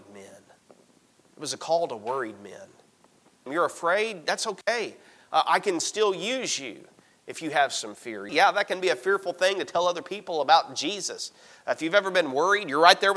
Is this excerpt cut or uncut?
cut